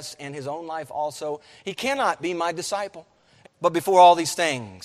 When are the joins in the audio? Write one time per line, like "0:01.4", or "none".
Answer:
0:03.4